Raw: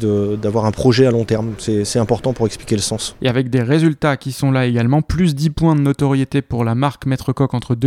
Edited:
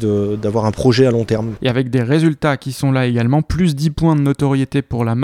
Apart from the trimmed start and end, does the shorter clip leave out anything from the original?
yes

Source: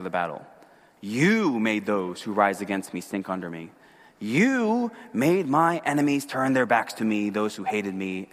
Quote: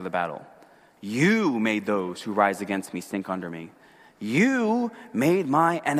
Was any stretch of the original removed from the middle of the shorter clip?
no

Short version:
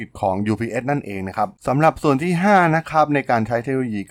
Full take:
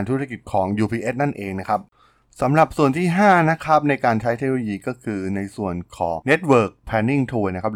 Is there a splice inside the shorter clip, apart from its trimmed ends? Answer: yes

